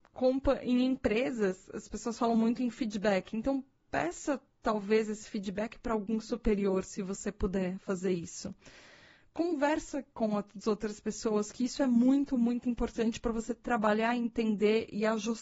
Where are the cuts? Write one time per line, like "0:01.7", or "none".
none

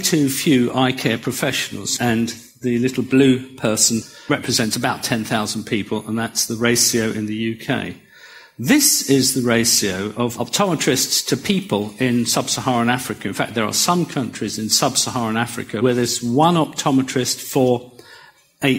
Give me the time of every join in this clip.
0:02.0

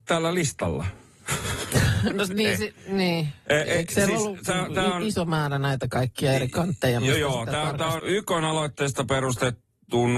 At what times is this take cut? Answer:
0:08.0

